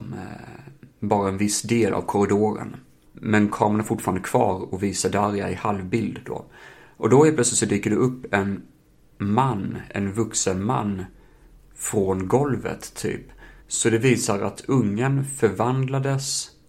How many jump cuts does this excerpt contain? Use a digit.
2